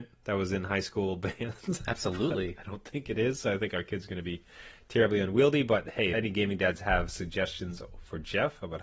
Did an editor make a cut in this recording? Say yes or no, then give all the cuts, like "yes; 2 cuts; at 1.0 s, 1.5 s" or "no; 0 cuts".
yes; 1 cut; at 6.1 s